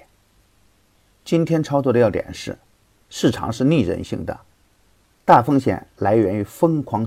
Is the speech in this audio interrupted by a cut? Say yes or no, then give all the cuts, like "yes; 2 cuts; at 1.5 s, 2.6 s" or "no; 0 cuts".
no; 0 cuts